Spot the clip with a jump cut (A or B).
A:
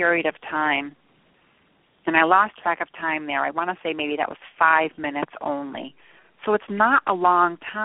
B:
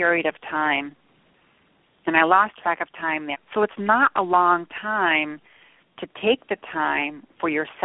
B